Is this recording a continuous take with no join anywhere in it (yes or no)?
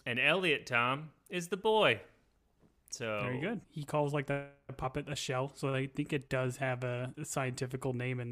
no